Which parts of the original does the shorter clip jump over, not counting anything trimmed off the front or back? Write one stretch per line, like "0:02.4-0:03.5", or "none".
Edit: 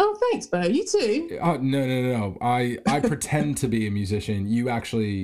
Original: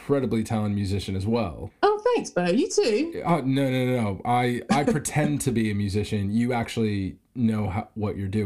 none